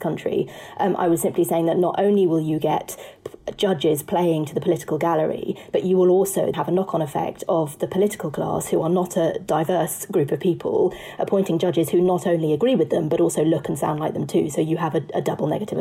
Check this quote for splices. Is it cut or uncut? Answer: cut